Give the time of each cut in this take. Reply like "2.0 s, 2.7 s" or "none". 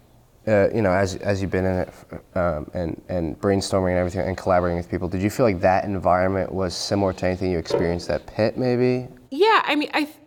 9.2 s